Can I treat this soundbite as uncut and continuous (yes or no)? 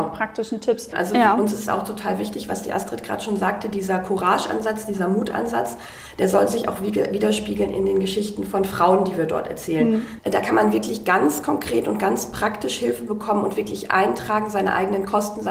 no